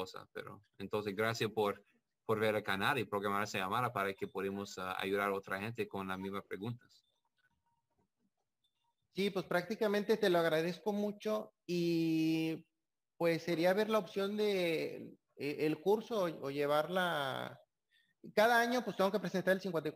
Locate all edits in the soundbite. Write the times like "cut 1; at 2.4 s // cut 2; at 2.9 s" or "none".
none